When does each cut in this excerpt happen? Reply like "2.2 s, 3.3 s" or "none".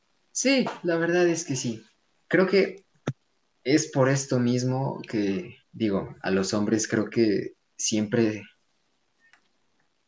2.1 s, 5.6 s